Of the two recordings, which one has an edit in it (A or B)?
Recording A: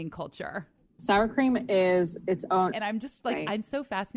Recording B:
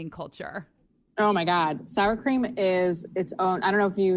A